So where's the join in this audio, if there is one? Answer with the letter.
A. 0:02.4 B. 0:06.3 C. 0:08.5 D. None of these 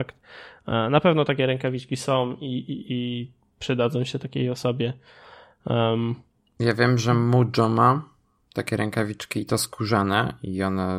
D